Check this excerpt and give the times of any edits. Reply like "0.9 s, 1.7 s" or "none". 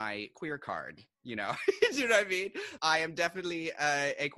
2.8 s